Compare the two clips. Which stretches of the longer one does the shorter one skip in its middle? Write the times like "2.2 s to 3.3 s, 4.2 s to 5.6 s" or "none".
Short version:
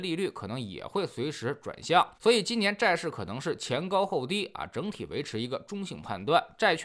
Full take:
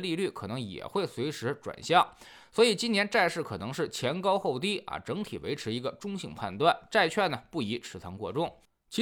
2.1 s to 2.5 s